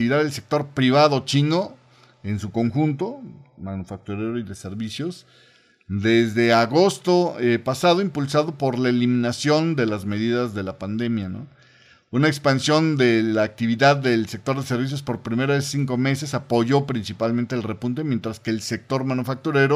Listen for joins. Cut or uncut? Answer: uncut